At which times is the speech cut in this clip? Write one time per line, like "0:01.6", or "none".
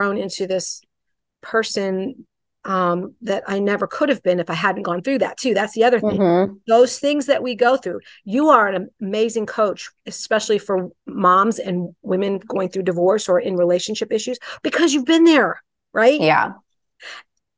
none